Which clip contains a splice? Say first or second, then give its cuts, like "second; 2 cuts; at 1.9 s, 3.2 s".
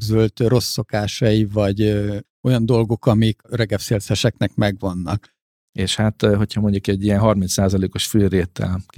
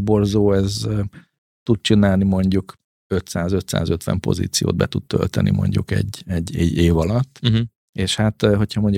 first; 1 cut; at 5.6 s